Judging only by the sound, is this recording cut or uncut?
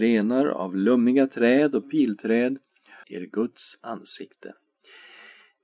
cut